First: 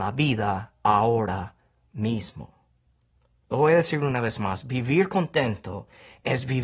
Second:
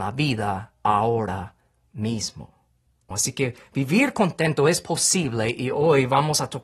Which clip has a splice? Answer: second; 1 cut; at 3.1 s

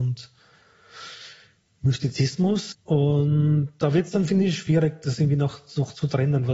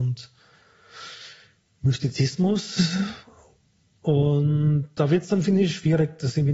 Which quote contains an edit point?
first; 1 cut; at 2.7 s

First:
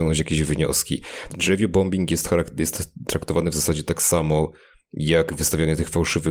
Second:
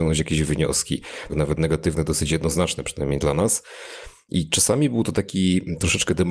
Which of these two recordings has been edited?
second; 2 cuts; at 1.3 s, 4.3 s

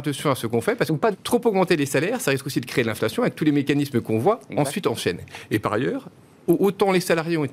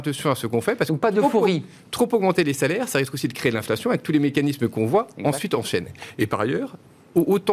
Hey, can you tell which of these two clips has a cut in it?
first; 1 cut; at 1.1 s

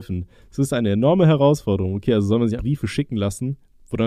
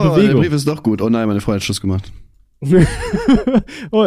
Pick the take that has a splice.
first; 1 cut; at 2.6 s

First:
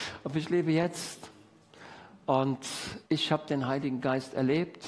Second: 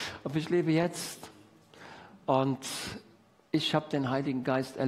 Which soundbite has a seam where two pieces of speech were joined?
first; 1 cut; at 3.0 s

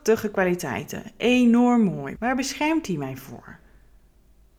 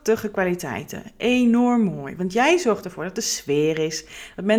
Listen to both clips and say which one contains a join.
first; 1 cut; at 2.2 s

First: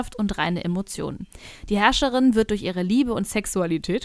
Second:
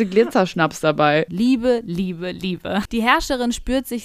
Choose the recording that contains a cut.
second; 2 cuts; at 1.3 s, 2.8 s

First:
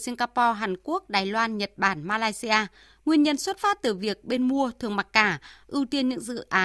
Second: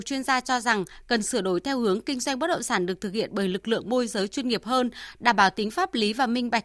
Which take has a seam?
first; 2 cuts; at 3.0 s, 5.6 s

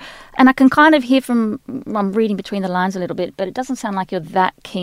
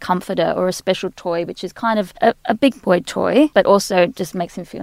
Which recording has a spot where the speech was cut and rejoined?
second; 2 cuts; at 2.2 s, 3.5 s

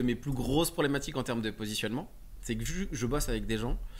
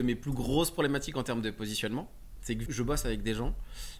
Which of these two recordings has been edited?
second; 1 cut; at 2.7 s

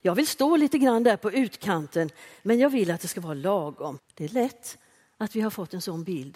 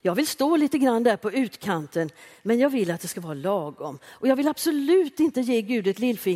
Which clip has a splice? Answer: first; 1 cut; at 4.0 s

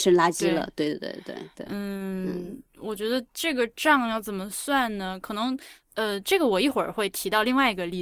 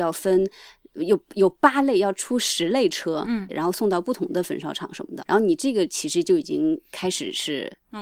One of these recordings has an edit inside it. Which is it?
second; 2 cuts; at 3.5 s, 5.2 s

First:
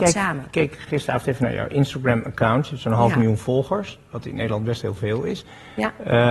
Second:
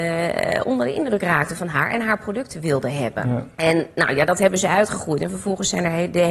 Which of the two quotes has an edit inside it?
second; 1 cut; at 3.5 s

